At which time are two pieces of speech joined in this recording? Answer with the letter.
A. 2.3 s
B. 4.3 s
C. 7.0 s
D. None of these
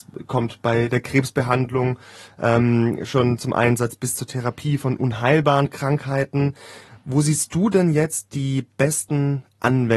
D